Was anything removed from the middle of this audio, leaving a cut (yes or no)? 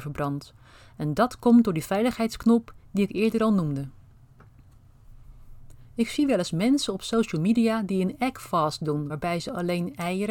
no